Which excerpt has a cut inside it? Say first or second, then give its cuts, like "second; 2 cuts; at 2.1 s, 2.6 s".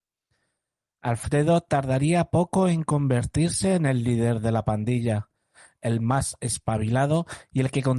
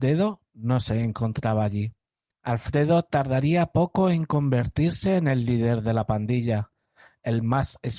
second; 1 cut; at 2.3 s